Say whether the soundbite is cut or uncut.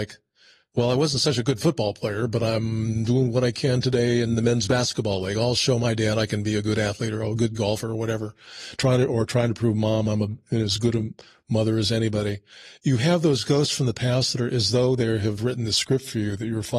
uncut